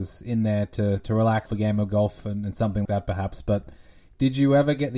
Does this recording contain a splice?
yes; 2 cuts; at 1.5 s, 2.9 s

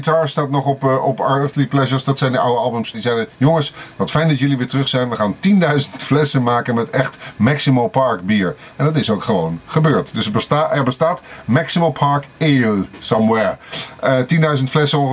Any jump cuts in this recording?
yes; 1 cut; at 2.9 s

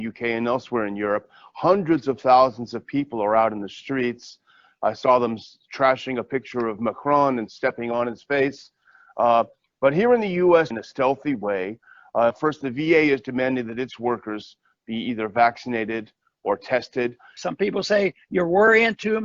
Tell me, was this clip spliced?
yes; 3 cuts; at 10.7 s, 12.3 s, 17.4 s

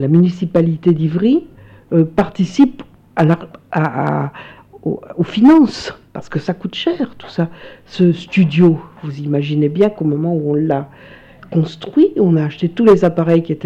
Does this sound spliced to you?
no; 0 cuts

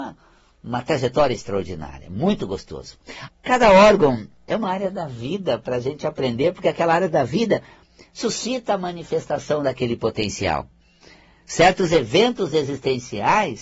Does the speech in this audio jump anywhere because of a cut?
yes; 1 cut; at 3.3 s

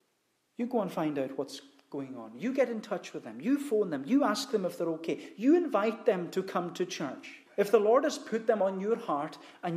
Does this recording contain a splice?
yes; 1 cut; at 7.5 s

